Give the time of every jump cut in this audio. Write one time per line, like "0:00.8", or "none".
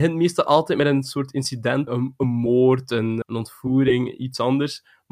0:01.9
0:03.2